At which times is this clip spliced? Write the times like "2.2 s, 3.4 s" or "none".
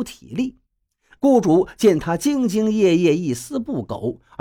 1.2 s